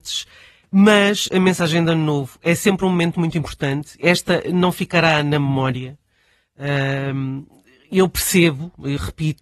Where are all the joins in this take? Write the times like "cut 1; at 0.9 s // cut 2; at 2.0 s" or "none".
none